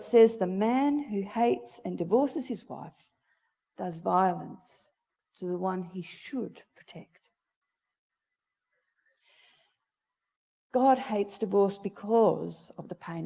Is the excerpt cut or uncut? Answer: uncut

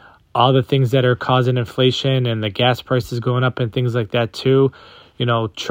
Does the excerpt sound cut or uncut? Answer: uncut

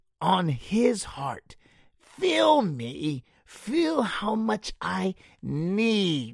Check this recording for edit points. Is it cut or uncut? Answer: uncut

